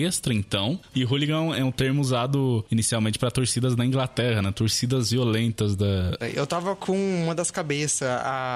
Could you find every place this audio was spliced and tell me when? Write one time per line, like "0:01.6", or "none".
0:00.9
0:06.2